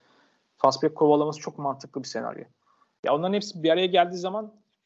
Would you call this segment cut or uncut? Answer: uncut